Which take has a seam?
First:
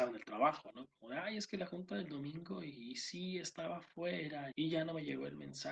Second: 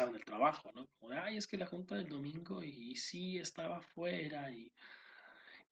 first; 1 cut; at 4.5 s

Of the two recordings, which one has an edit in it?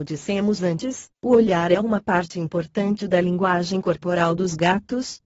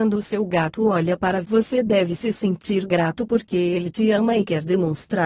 second; 1 cut; at 1.4 s

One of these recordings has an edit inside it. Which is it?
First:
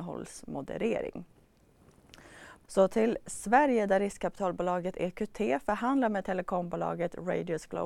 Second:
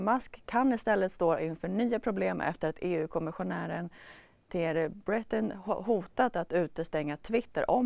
first; 1 cut; at 2.6 s

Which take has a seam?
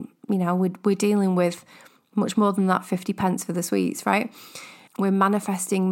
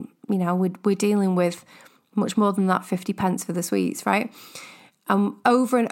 first; 1 cut; at 4.9 s

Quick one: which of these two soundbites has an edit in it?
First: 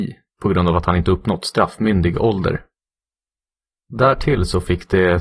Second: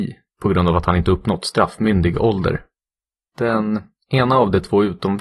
second; 1 cut; at 3.3 s

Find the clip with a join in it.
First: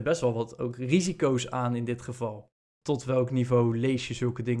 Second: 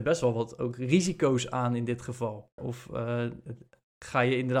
second; 1 cut; at 2.6 s

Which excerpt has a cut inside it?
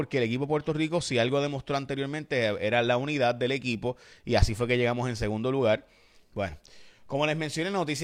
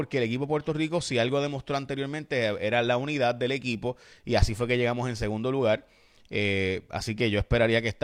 first; 1 cut; at 6.2 s

